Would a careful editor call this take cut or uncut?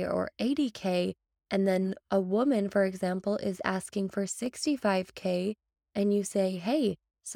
uncut